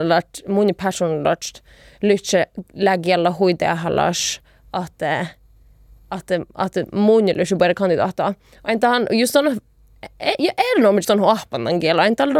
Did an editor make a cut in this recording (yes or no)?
yes